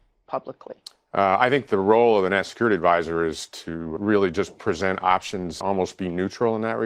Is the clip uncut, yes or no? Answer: no